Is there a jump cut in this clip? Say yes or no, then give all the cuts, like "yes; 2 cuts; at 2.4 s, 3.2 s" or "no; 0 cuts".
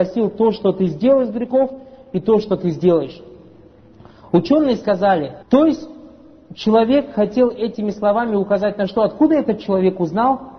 yes; 1 cut; at 5.4 s